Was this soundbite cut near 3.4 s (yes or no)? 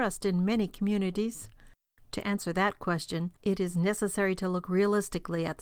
yes